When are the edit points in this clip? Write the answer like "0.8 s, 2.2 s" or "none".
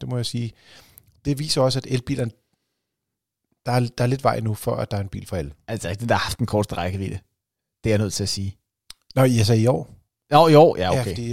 none